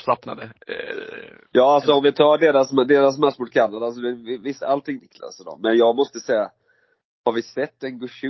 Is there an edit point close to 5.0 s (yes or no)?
yes